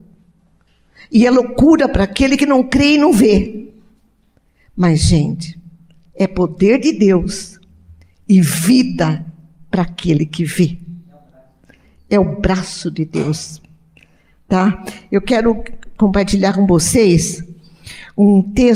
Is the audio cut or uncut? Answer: uncut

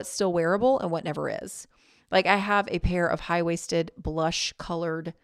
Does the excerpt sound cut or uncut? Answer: uncut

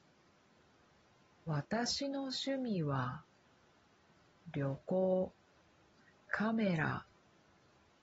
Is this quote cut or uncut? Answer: cut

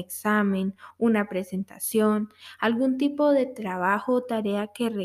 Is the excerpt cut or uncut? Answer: uncut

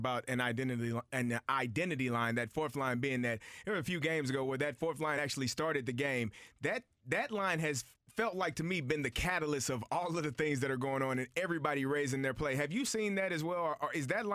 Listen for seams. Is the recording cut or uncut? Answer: uncut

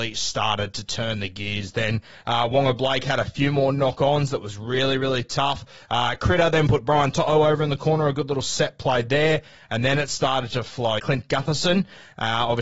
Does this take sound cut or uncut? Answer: cut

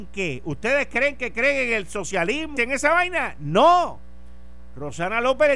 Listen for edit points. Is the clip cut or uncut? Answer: cut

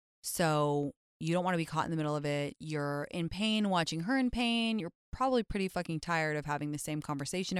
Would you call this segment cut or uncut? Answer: uncut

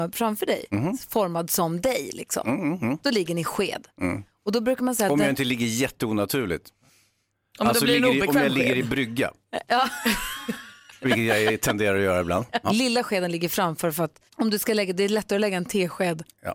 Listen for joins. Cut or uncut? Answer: cut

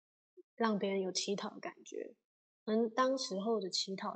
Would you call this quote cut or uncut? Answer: uncut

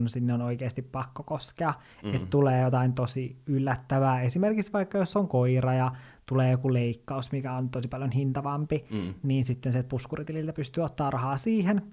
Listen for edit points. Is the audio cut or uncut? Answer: uncut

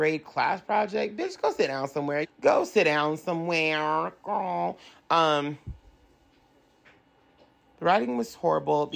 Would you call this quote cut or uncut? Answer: cut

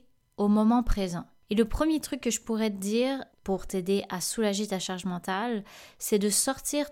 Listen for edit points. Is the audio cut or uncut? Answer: cut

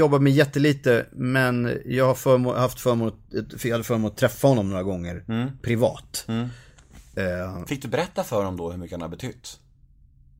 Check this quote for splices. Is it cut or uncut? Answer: uncut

